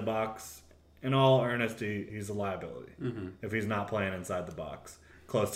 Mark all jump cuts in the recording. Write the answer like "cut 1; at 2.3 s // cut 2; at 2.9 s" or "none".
cut 1; at 2.1 s

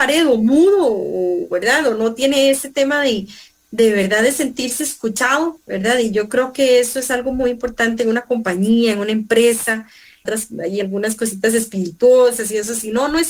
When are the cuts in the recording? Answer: cut 1; at 10.2 s

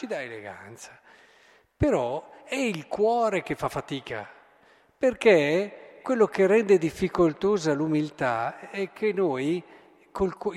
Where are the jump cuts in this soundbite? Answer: cut 1; at 6.0 s

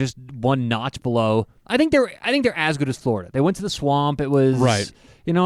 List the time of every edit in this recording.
none

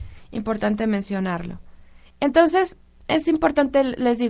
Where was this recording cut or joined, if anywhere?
cut 1; at 2.0 s

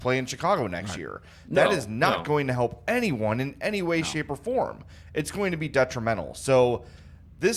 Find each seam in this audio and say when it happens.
none

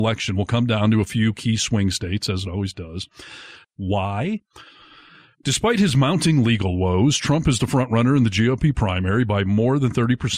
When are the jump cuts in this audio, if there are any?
cut 1; at 3.6 s

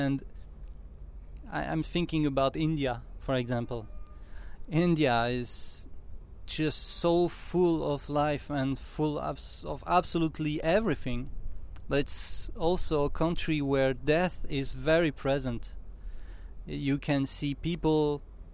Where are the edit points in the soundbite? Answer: none

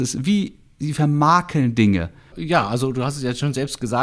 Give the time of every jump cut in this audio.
cut 1; at 2.3 s

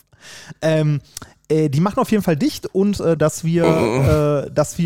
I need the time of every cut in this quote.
cut 1; at 3.2 s

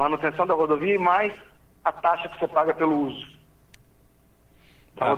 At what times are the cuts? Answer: none

